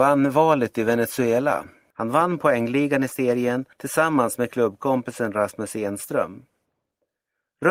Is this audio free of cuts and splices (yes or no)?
no